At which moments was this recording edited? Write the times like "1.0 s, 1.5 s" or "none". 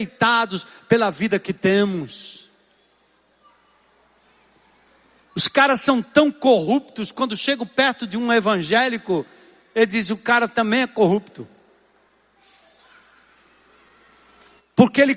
none